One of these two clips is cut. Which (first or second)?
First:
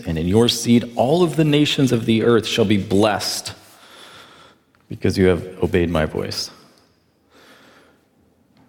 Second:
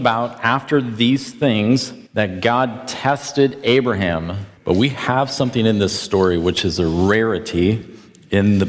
second